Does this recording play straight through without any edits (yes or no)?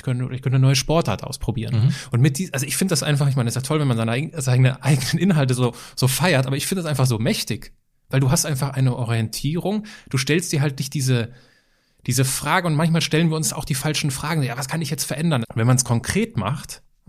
no